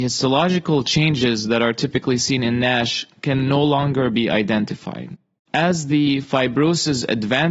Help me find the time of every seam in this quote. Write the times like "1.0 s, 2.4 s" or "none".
5.4 s

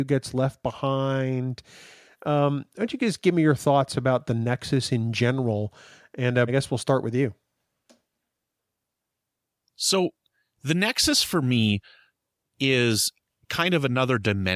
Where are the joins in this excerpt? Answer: 6.5 s

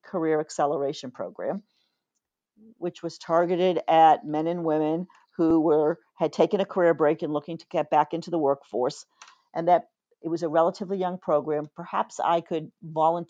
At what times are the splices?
none

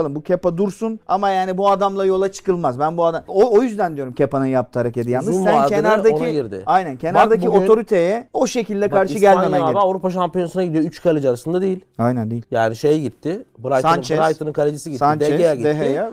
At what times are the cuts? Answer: none

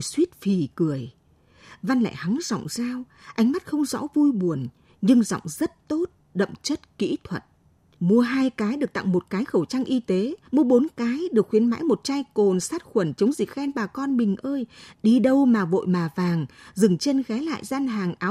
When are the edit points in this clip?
7.9 s, 10.4 s, 14.9 s

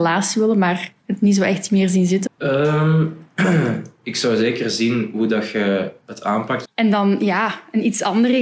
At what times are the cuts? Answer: 2.3 s, 6.6 s

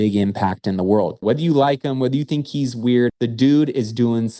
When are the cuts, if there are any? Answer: 1.2 s, 3.1 s

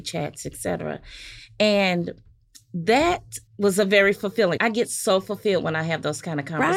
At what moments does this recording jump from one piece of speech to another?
3.5 s, 4.6 s

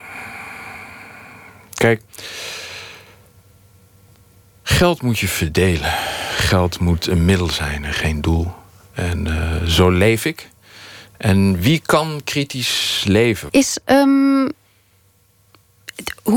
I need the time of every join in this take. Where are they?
11.1 s, 13.5 s

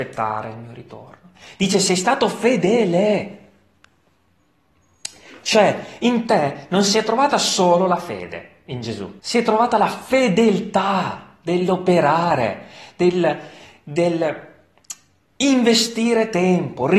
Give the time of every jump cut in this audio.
9.2 s

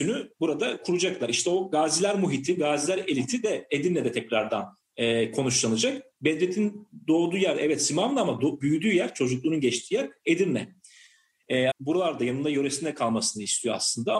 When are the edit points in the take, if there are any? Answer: 11.7 s

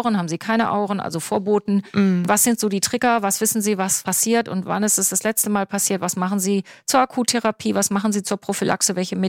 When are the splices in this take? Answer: none

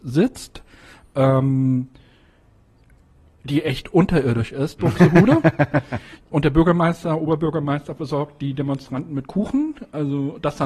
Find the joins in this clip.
4.8 s

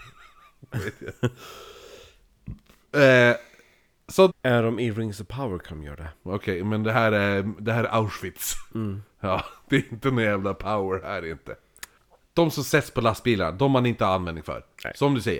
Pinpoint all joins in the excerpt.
4.3 s

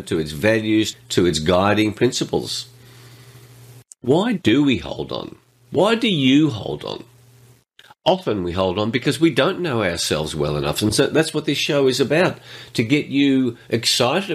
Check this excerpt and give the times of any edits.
0.9 s

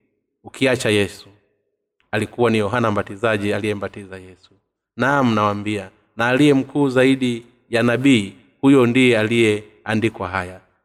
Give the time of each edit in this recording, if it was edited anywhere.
none

